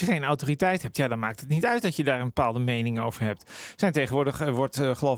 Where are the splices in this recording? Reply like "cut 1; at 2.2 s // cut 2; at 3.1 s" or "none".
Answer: none

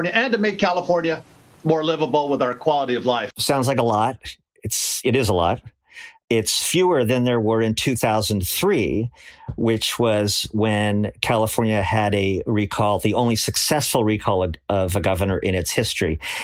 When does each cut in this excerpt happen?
cut 1; at 3.3 s

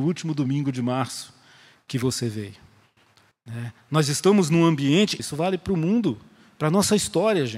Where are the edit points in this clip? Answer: cut 1; at 3.3 s // cut 2; at 5.2 s

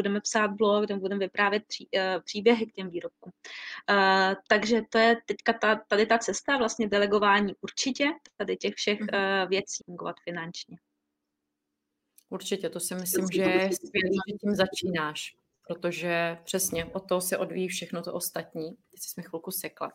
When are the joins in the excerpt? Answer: cut 1; at 9.8 s

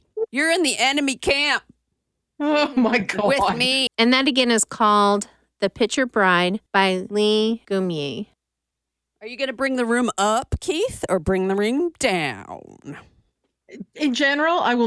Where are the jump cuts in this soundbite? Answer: cut 1; at 3.9 s

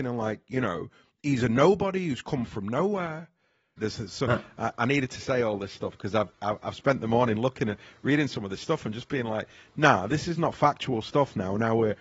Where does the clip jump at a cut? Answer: cut 1; at 3.8 s // cut 2; at 6.3 s

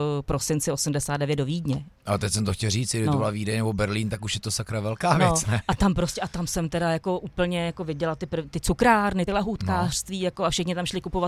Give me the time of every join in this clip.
none

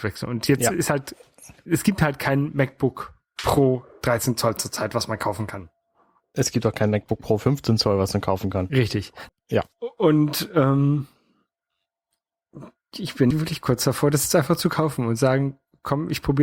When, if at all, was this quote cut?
cut 1; at 9.3 s // cut 2; at 13.3 s

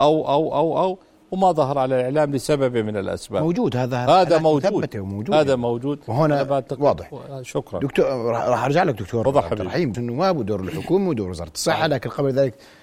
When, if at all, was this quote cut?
cut 1; at 9.9 s

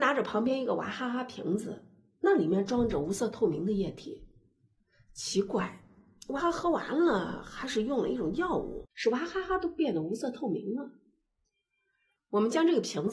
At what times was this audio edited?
cut 1; at 6.4 s // cut 2; at 8.9 s

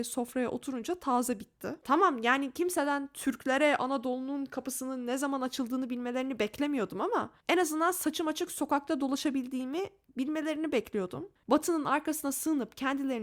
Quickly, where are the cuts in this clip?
cut 1; at 1.8 s // cut 2; at 11.4 s

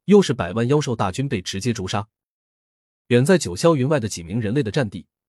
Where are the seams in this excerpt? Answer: cut 1; at 3.0 s

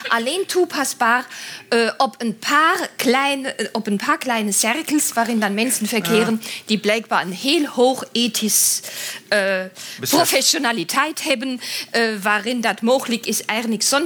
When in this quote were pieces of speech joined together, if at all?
none

